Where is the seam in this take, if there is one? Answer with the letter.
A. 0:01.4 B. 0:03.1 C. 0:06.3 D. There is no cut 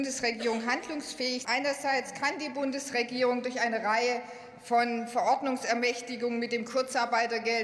A